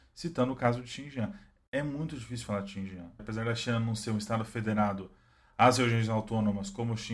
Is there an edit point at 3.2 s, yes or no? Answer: yes